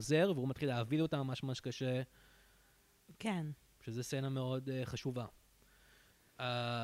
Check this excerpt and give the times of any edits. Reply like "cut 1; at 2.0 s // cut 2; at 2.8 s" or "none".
cut 1; at 3.1 s